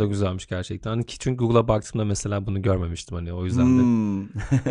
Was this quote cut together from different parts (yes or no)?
no